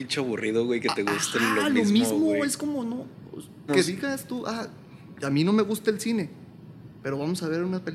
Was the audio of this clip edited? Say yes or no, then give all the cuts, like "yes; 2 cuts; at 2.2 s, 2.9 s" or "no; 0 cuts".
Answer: yes; 2 cuts; at 3.7 s, 5.1 s